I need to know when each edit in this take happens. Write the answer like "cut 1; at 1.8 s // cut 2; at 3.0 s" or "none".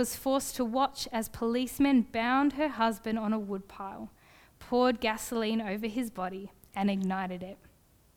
none